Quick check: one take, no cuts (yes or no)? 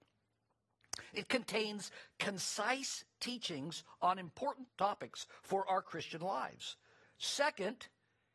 no